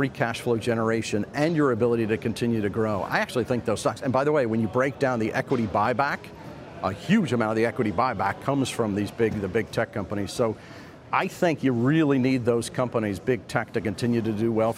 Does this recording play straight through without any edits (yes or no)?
yes